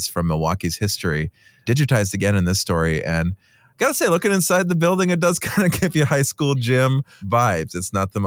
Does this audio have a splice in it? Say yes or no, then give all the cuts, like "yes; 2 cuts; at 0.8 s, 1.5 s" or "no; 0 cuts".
no; 0 cuts